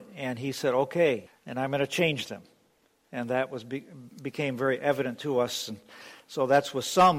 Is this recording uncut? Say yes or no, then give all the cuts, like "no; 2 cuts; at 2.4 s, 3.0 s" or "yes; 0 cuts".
no; 1 cut; at 1.3 s